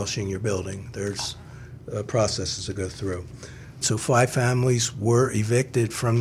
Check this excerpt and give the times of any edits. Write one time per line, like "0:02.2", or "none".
0:03.8